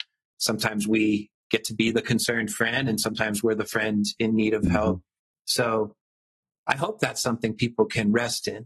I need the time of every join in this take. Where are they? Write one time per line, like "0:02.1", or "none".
none

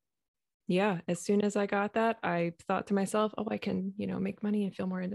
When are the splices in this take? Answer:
none

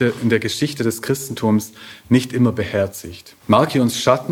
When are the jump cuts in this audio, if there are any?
0:03.4

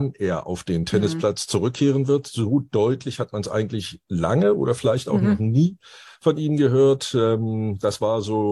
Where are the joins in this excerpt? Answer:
none

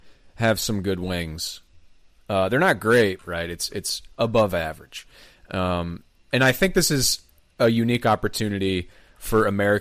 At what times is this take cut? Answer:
0:03.2

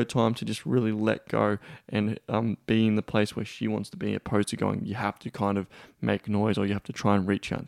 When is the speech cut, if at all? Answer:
none

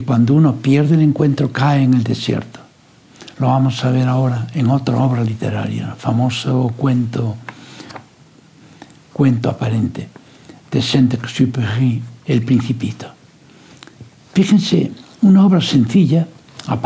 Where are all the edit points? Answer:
0:12.2

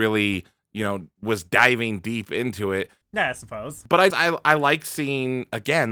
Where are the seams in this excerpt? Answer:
0:03.0
0:04.1

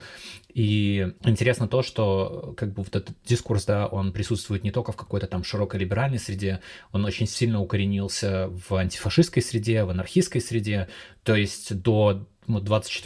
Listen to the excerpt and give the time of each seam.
0:01.2

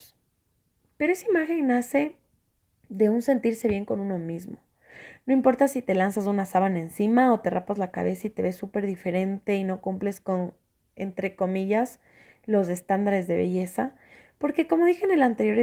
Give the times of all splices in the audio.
none

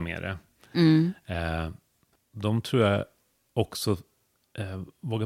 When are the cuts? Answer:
0:02.2

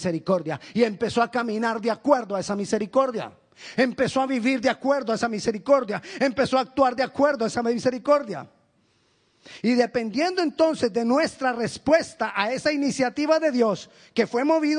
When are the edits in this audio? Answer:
none

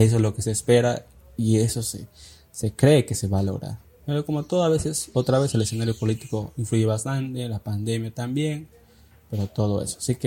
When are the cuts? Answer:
none

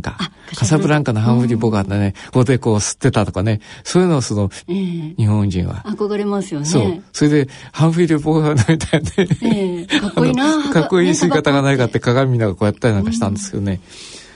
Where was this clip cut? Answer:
0:02.3
0:04.6

